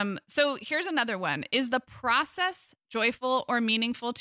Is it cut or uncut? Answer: uncut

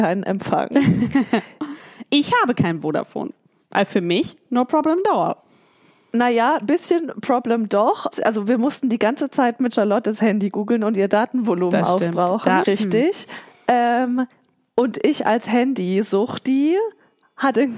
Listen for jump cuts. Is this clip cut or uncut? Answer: cut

